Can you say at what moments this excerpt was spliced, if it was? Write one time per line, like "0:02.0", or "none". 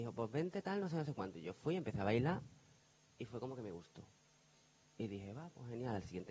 none

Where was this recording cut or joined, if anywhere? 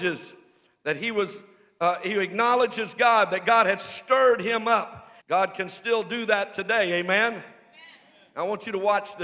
0:05.2

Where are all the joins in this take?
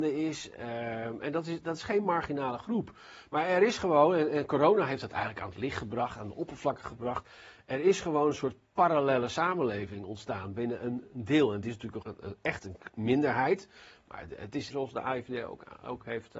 0:12.0
0:14.7

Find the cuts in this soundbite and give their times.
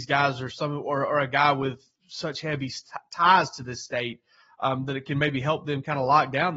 none

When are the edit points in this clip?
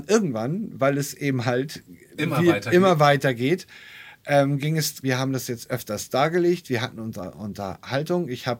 0:05.0

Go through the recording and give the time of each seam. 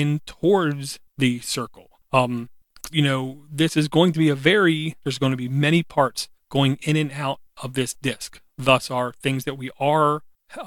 0:02.9
0:05.0

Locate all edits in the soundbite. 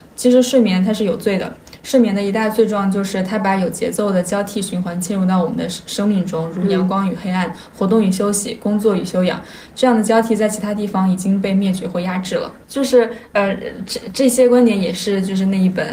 0:12.6

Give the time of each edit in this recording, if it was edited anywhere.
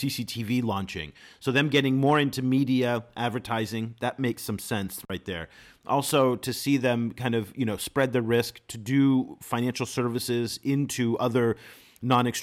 none

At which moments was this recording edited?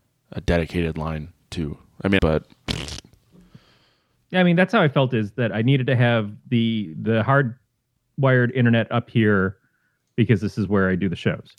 0:02.2

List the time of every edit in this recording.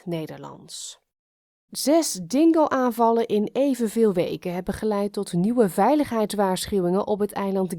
0:01.7

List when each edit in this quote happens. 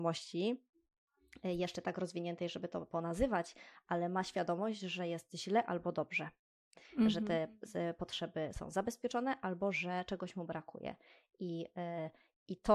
none

